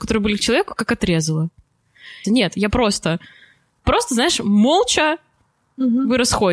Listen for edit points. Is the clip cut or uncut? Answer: cut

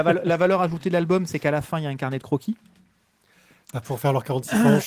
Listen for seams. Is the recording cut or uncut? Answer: uncut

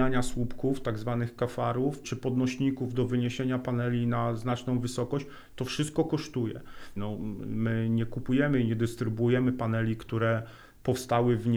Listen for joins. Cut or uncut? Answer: cut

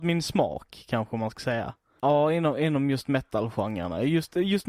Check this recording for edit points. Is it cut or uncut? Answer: cut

